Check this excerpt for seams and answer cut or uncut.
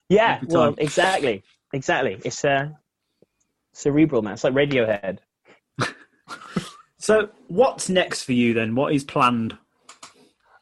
uncut